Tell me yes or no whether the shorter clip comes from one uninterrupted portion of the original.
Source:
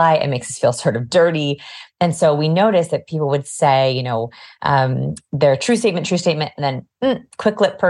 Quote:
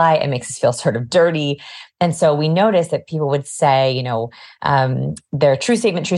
yes